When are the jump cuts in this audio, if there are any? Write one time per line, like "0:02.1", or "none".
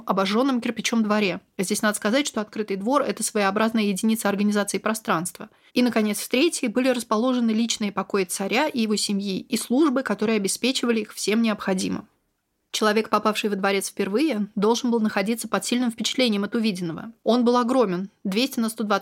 0:05.7
0:17.2